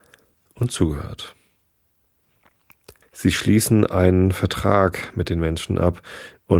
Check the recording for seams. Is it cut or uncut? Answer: cut